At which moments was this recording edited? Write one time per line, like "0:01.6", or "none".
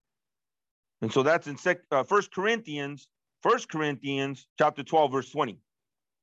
0:04.5